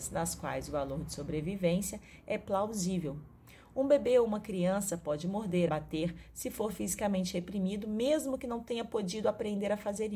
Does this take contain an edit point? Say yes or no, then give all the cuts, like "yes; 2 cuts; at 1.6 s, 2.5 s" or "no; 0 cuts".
yes; 1 cut; at 5.7 s